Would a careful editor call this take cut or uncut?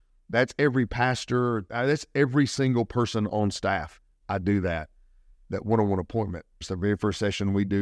cut